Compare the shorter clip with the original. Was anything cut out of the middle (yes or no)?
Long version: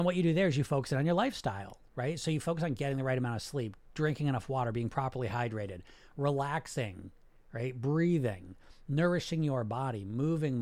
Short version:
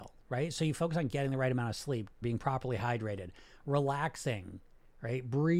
yes